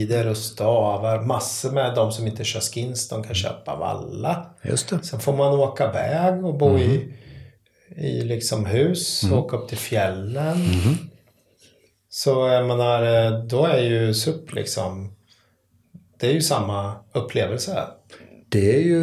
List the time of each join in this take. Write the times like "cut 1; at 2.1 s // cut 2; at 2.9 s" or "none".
none